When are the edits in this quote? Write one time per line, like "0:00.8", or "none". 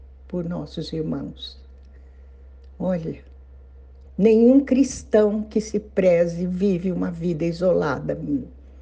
0:04.0

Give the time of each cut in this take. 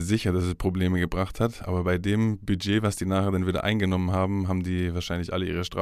none

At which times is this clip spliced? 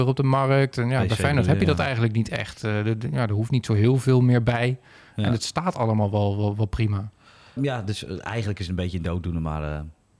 0:07.6

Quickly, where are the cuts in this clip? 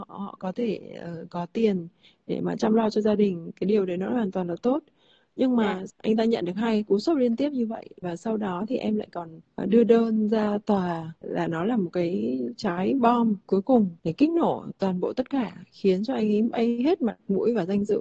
0:05.9
0:11.2
0:14.0

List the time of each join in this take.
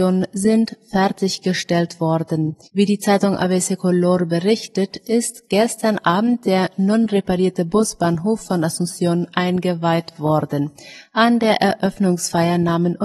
0:02.6

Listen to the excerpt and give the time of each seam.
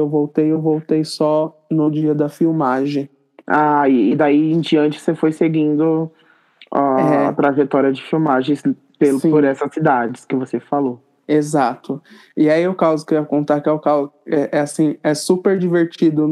none

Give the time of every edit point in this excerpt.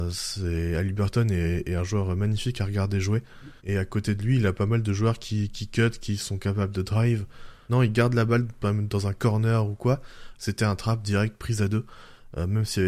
0:03.6
0:07.7
0:10.3

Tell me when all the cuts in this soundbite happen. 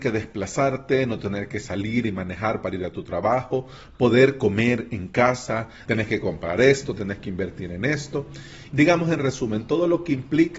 0:05.8
0:07.0
0:08.7

